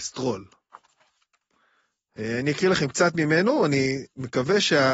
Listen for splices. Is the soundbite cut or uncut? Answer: uncut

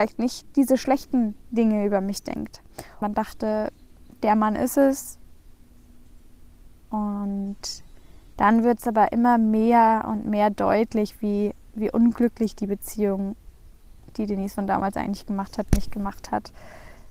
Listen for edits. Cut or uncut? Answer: cut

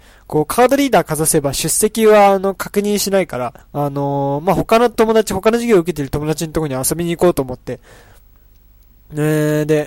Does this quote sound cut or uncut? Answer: cut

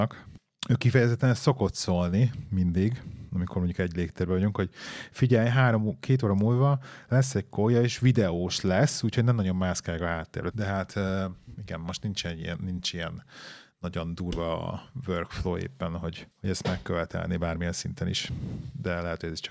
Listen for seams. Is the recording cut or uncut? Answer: cut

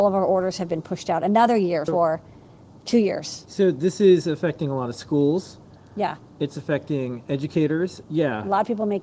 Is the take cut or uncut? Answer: cut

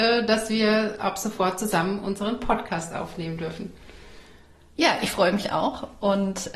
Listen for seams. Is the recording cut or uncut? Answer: uncut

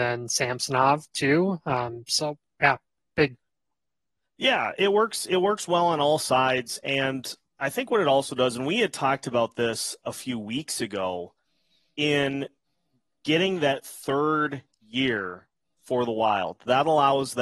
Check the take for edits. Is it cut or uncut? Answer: uncut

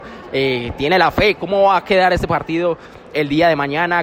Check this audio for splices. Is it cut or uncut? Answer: cut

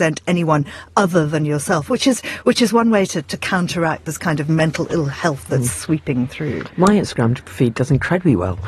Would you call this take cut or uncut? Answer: uncut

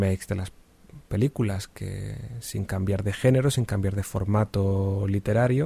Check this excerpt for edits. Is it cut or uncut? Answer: uncut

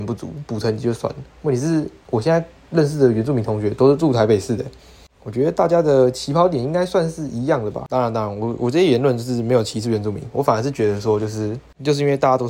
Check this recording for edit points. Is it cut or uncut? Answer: uncut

